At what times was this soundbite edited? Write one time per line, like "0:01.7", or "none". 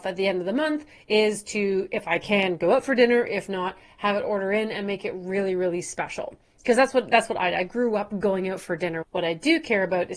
0:09.0